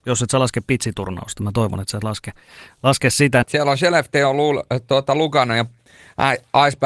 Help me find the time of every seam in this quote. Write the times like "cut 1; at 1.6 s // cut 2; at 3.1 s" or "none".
cut 1; at 3.4 s